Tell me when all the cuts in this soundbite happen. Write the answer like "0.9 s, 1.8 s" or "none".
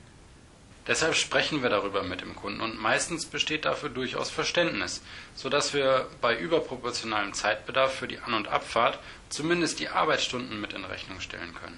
none